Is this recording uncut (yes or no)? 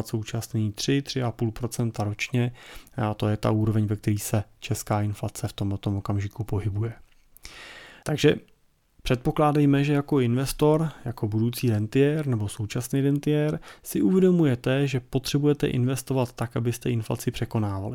no